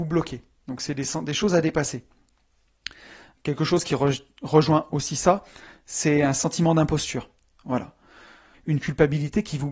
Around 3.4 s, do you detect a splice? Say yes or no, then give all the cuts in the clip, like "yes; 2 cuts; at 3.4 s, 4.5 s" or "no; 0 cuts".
no; 1 cut; at 8.5 s